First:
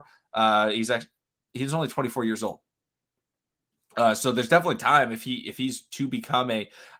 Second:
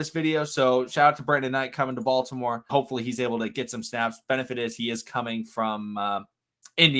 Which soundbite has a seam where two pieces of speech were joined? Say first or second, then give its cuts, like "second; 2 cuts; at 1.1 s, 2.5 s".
second; 1 cut; at 2.7 s